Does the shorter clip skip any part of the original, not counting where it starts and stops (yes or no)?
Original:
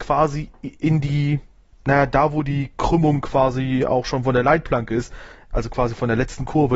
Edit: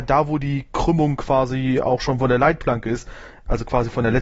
no